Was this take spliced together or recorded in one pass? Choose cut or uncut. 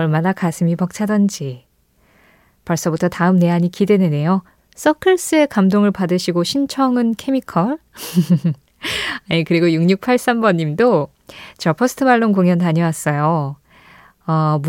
cut